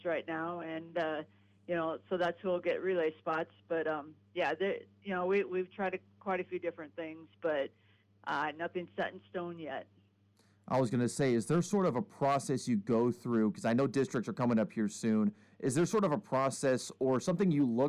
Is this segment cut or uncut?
uncut